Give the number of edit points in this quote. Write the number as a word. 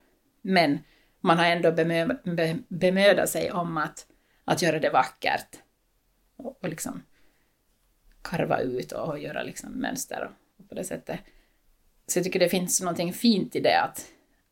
zero